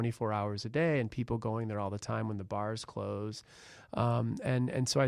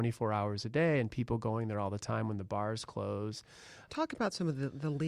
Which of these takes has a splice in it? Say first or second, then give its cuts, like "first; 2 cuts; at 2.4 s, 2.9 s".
second; 1 cut; at 3.9 s